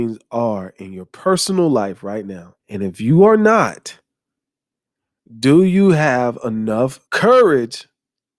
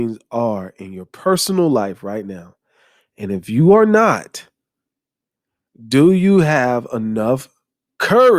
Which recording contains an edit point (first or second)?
first